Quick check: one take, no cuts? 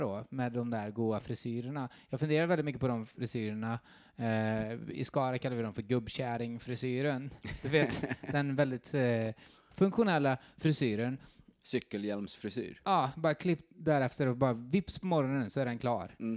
yes; 0 cuts

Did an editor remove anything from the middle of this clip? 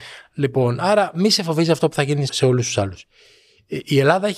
yes; 1 cut; at 2.3 s

